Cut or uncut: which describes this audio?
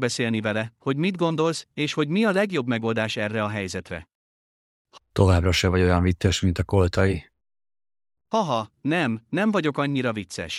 uncut